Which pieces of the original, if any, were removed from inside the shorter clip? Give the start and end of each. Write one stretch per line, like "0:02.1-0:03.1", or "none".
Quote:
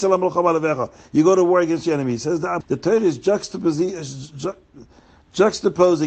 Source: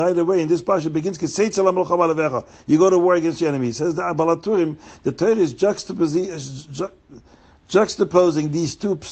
0:04.1-0:05.0